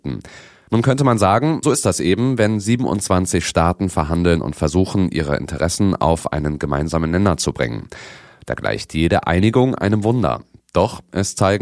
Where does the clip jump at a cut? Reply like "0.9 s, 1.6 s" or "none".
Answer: 1.6 s